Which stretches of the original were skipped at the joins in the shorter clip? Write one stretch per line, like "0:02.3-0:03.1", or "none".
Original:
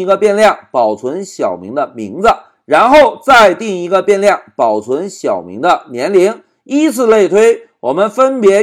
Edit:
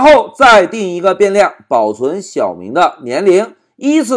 none